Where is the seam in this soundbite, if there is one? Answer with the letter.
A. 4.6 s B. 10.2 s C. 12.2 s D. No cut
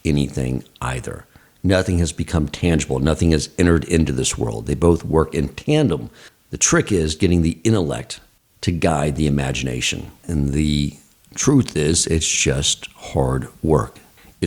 B